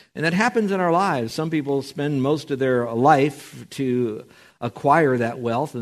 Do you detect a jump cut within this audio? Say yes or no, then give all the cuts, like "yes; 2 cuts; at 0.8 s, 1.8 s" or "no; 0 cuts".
no; 0 cuts